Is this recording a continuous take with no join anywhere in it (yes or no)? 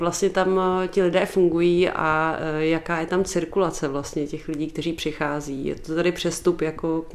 yes